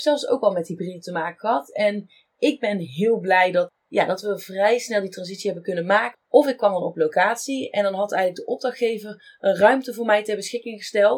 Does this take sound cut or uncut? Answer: cut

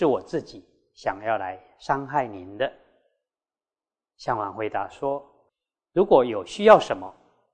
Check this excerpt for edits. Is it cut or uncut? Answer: uncut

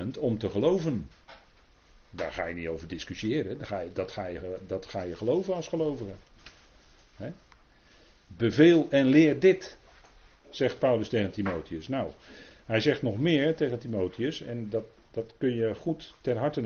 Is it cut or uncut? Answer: uncut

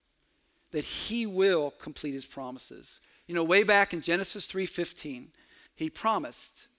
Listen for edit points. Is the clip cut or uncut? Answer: cut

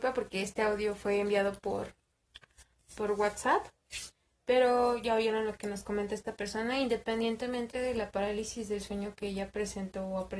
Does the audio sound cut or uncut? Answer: uncut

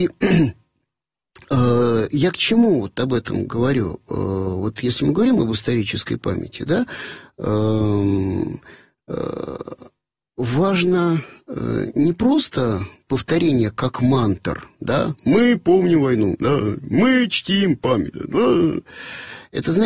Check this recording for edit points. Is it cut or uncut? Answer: uncut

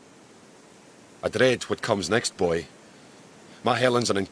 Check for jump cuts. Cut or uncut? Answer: uncut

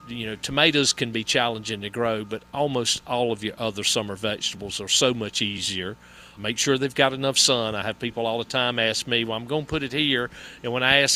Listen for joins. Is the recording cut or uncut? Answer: cut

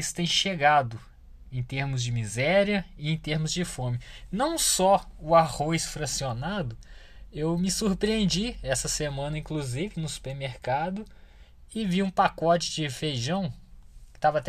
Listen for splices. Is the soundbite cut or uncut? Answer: uncut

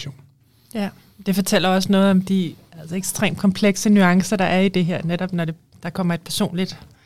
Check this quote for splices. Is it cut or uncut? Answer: uncut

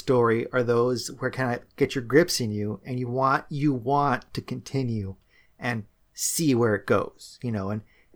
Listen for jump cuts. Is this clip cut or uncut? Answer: uncut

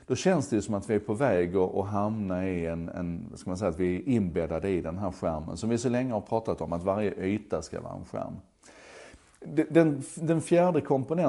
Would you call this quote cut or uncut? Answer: uncut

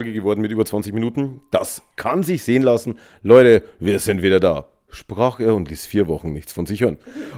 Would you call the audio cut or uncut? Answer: uncut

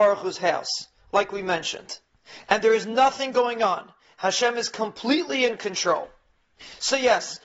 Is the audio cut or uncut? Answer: uncut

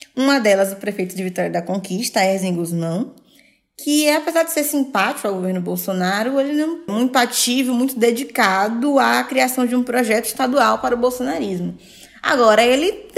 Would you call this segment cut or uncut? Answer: cut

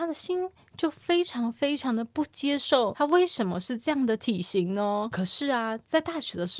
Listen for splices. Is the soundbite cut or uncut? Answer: uncut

